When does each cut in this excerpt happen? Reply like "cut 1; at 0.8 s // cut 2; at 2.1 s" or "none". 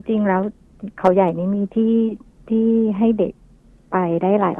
none